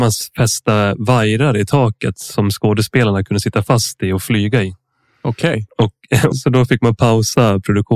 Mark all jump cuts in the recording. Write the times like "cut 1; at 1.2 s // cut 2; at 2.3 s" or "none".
cut 1; at 6.3 s